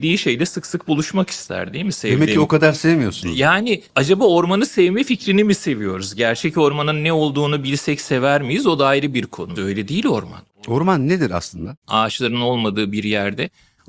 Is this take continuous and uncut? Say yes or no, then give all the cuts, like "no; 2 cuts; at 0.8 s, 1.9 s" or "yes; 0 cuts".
no; 2 cuts; at 9.6 s, 11.8 s